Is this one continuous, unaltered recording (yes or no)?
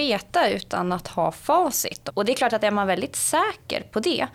no